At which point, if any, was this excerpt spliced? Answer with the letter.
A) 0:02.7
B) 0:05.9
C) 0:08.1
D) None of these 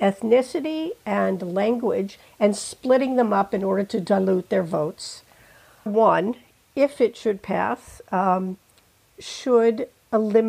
B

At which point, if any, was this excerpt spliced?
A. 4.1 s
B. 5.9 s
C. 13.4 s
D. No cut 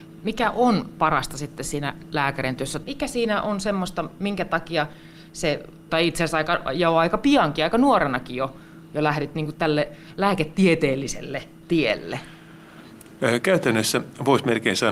B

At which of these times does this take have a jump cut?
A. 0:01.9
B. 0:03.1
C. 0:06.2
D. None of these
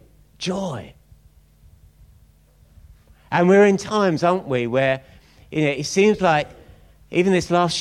D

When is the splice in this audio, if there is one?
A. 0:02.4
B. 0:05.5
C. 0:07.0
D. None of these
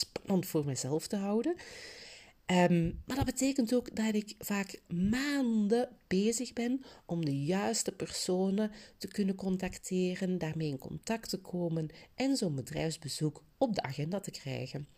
D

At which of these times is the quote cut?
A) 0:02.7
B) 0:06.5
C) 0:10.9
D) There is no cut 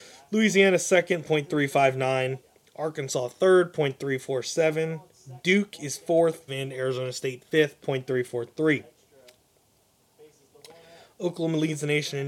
B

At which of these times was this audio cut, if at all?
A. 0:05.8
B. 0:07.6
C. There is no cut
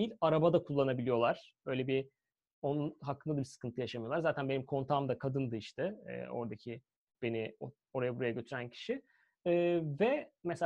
B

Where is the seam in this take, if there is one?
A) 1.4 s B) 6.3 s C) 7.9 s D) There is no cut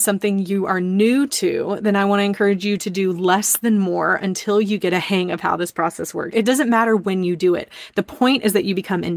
B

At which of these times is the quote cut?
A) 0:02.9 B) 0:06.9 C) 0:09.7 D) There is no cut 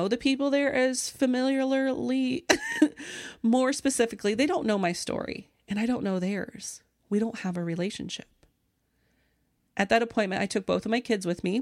D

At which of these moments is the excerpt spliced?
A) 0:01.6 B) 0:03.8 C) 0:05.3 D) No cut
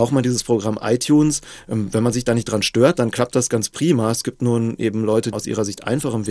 C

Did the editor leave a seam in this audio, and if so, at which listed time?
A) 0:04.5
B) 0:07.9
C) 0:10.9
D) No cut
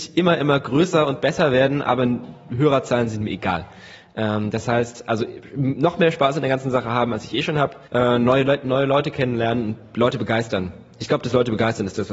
B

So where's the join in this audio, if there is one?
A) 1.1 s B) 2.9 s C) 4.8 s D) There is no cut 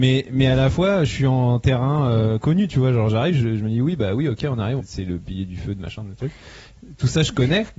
C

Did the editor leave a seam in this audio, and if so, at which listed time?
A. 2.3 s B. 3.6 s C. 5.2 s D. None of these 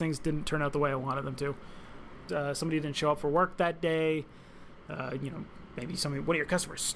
A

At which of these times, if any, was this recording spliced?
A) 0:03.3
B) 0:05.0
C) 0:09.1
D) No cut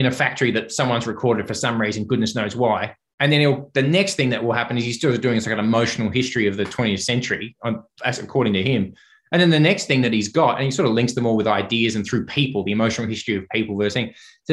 D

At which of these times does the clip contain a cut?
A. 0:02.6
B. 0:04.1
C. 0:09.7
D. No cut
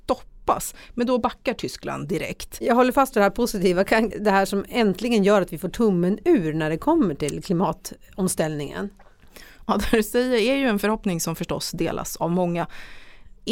B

